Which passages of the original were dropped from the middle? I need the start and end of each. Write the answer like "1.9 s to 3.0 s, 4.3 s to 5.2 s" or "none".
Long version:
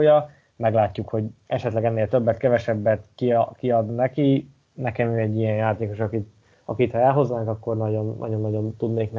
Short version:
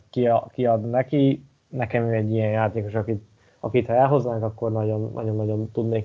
none